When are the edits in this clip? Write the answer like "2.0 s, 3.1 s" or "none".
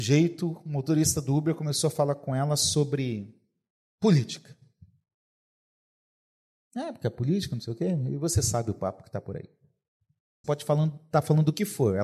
10.4 s